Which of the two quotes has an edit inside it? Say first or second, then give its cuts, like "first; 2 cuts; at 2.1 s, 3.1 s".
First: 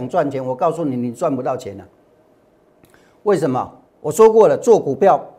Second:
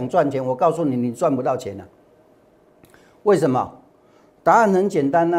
first; 1 cut; at 3.9 s